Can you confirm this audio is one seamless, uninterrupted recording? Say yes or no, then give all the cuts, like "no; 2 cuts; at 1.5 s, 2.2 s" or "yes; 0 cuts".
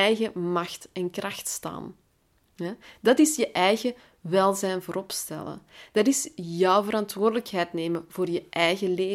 yes; 0 cuts